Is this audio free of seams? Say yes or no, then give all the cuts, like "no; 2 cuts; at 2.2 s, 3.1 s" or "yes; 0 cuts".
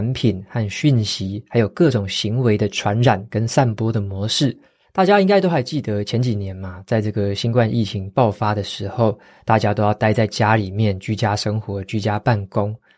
no; 1 cut; at 4.8 s